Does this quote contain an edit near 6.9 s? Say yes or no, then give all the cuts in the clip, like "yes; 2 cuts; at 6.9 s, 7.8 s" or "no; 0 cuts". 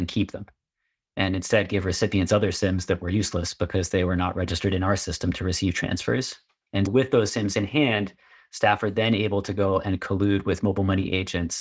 yes; 1 cut; at 6.9 s